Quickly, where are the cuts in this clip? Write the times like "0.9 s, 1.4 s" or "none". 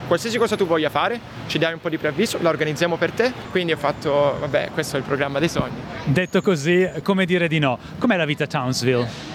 none